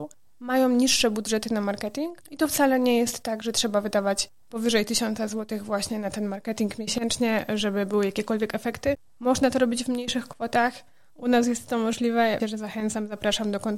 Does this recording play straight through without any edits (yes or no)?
no